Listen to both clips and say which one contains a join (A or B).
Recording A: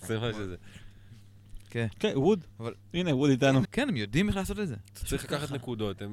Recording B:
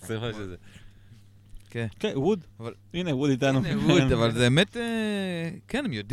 A